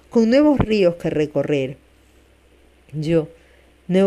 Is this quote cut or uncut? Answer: uncut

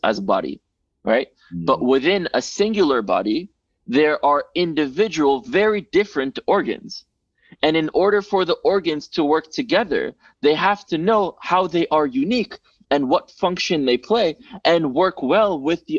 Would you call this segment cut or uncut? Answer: uncut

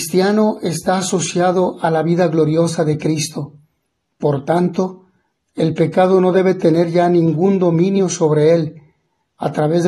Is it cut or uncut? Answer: uncut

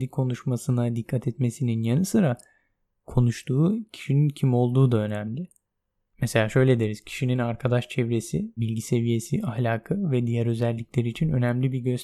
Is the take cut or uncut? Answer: cut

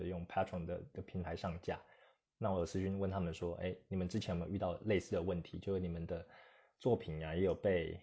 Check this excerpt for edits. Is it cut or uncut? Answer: uncut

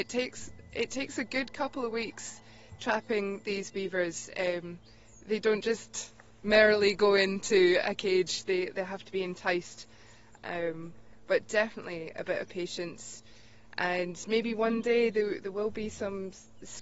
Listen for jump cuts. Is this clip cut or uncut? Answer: cut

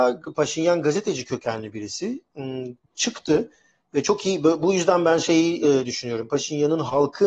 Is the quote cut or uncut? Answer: uncut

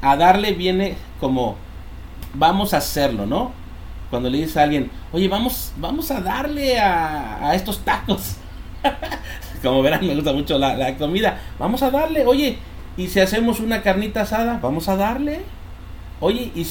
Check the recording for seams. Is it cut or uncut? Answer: uncut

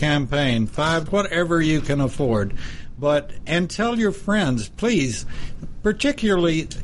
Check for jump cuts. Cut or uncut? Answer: cut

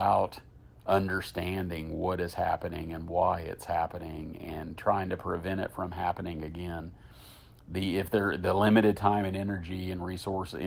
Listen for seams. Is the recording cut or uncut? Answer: uncut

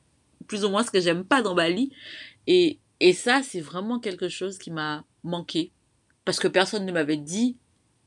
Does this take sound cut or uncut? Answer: uncut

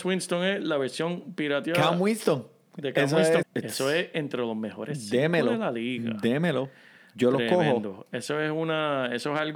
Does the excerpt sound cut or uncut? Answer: cut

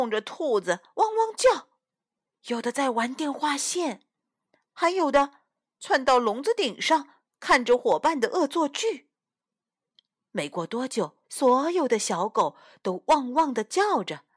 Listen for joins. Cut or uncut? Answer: cut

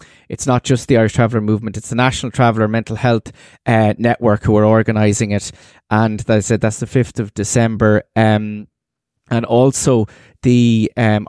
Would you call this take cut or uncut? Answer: uncut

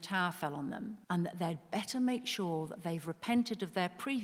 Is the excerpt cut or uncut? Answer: cut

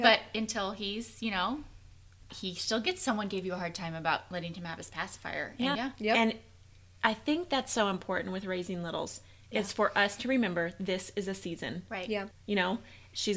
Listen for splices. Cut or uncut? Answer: cut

